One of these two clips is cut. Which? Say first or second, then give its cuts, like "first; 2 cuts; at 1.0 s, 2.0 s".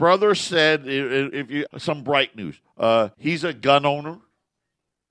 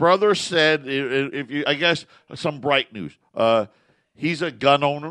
first; 2 cuts; at 1.7 s, 3.1 s